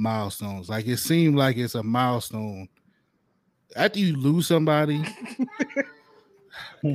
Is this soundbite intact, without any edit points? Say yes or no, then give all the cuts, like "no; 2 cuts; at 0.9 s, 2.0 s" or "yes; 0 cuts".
yes; 0 cuts